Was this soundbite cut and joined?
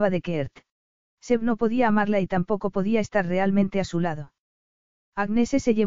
yes; 1 cut; at 1.0 s

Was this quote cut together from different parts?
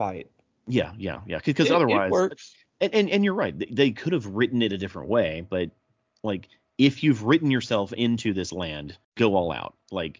yes; 1 cut; at 9.0 s

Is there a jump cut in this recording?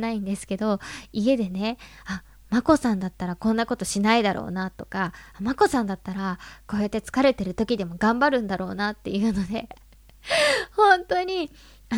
no; 0 cuts

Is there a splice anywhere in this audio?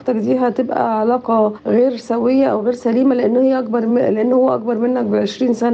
no; 0 cuts

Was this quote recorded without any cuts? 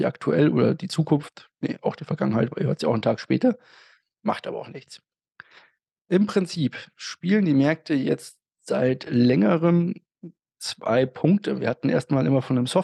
yes; 0 cuts

